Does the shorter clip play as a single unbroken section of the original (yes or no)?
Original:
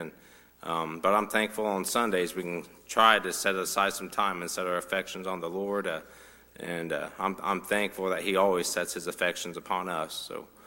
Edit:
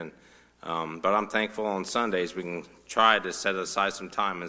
yes